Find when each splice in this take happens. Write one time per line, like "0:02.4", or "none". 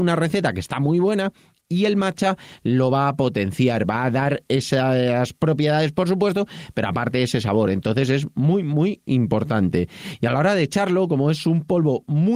none